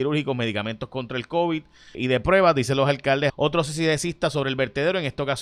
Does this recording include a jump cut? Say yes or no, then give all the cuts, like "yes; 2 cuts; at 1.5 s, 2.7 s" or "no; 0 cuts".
yes; 2 cuts; at 1.9 s, 3.3 s